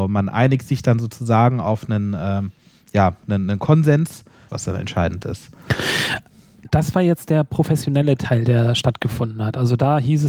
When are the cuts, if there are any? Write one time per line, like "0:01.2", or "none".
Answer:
0:04.5